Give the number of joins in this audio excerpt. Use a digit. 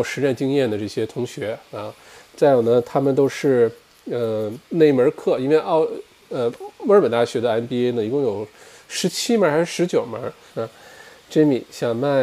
2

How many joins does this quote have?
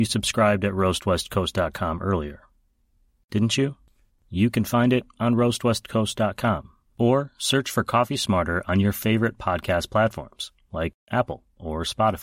2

